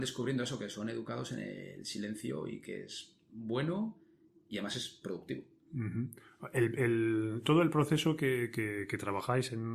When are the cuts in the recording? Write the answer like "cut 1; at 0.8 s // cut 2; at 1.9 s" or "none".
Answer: none